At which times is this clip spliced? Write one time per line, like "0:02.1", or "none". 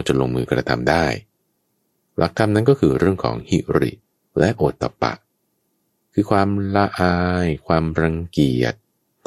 none

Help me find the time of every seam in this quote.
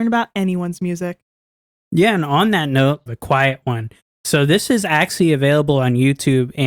0:03.1

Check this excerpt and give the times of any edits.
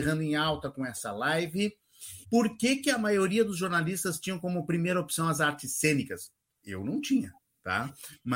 0:02.2

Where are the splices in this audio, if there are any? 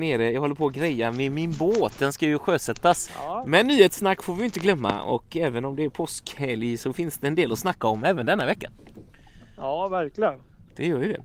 0:03.1

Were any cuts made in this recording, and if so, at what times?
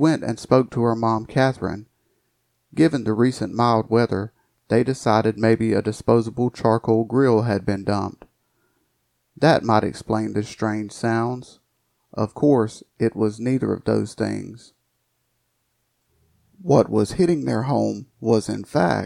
none

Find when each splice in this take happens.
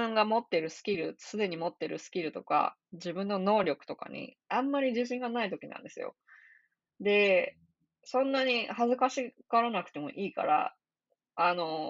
none

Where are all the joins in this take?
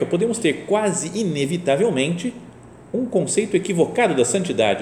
none

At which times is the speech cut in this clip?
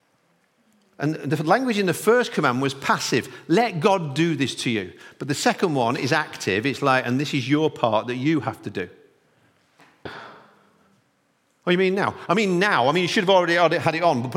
0:10.1

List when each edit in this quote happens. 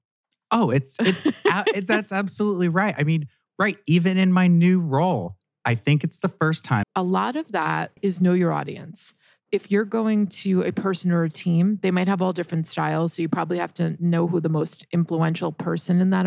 0:06.8
0:08.0

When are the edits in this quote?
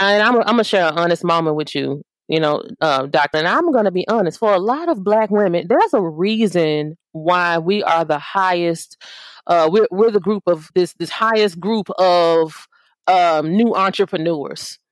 0:03.3
0:10.7

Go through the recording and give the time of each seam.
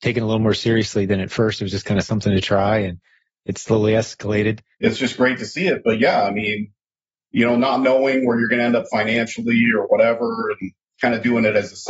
0:04.7

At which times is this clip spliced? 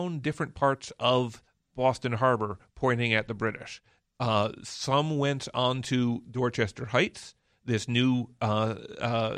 none

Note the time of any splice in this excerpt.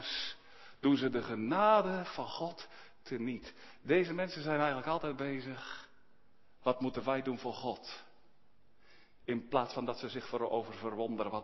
none

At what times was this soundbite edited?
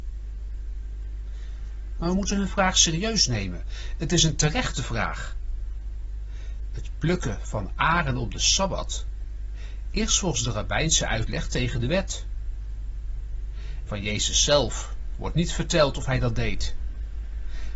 0:02.0
0:13.9

